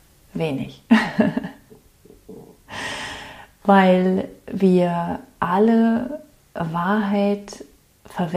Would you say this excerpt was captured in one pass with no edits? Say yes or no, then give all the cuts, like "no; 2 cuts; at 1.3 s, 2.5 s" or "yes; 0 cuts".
yes; 0 cuts